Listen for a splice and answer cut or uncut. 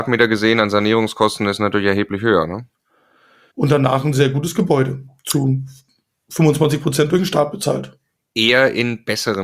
cut